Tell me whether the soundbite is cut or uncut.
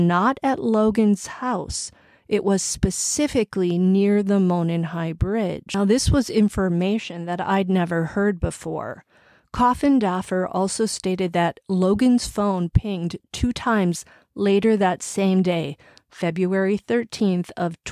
uncut